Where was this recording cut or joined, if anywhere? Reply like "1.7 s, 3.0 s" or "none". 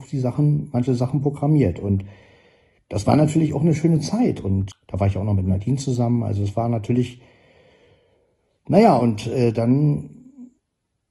4.7 s